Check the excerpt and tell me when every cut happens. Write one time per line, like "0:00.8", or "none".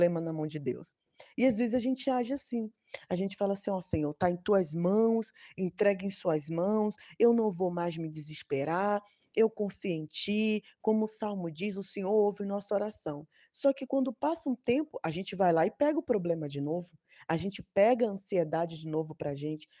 none

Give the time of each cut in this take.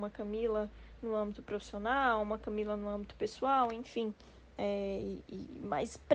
none

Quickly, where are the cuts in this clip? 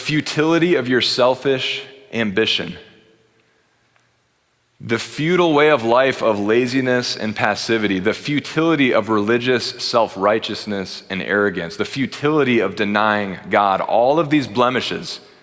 none

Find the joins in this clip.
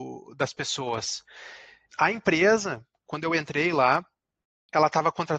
0:01.9

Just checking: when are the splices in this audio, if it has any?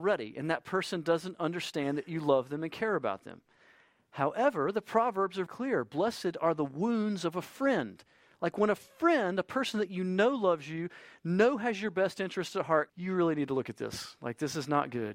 0:05.5
0:12.9

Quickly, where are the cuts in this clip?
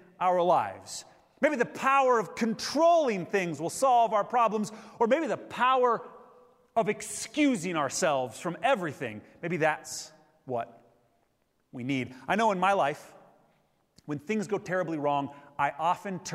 none

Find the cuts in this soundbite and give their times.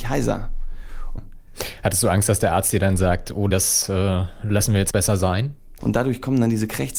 0:01.2
0:03.5
0:05.8

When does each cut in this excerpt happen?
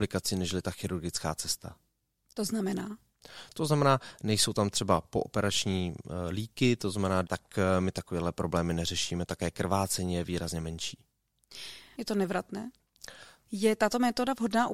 0:07.2
0:11.9
0:13.4

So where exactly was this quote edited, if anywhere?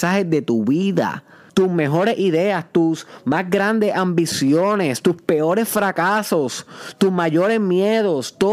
0:01.5

